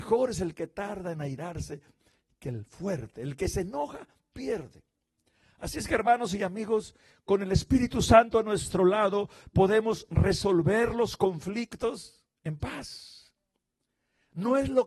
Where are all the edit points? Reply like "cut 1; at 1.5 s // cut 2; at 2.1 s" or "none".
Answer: none